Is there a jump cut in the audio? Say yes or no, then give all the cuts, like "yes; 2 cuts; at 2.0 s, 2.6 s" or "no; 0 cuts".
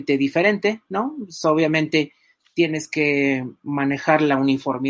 no; 0 cuts